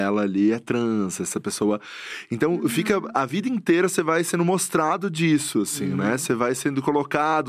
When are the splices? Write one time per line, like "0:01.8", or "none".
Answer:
none